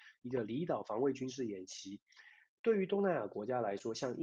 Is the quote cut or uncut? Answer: uncut